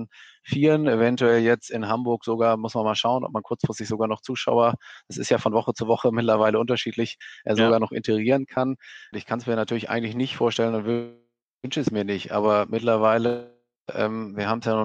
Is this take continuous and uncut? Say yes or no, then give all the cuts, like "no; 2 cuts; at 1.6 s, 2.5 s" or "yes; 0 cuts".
no; 1 cut; at 9.1 s